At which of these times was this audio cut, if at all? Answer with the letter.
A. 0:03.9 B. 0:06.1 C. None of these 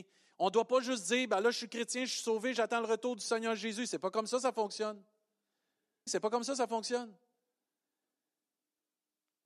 B